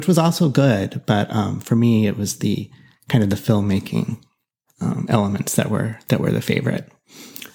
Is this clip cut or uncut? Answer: uncut